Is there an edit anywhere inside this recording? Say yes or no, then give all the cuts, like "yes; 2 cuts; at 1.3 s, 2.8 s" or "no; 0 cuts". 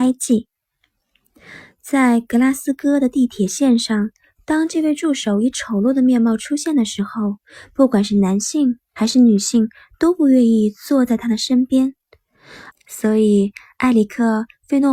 yes; 1 cut; at 12.7 s